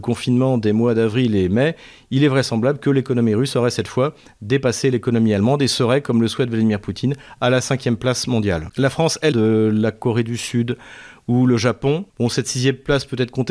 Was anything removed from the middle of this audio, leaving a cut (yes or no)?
yes